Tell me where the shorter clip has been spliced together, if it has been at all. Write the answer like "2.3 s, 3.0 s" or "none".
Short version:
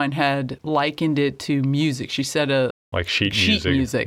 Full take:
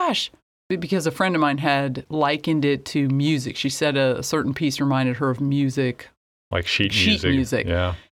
2.7 s